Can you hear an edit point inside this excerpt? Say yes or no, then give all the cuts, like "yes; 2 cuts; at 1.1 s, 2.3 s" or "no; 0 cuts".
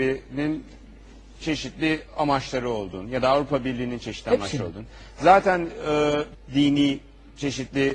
yes; 1 cut; at 6.3 s